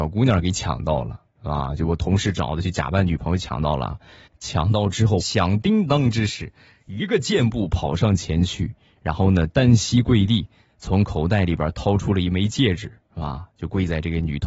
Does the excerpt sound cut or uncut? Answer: cut